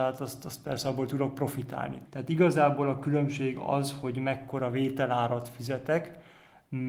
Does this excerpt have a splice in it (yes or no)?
yes